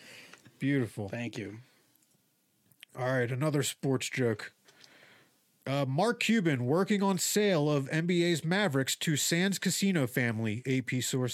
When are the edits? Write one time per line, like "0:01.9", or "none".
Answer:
none